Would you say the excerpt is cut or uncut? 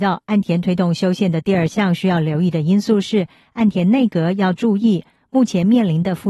uncut